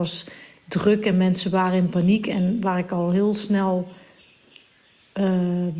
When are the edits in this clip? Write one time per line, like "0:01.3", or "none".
none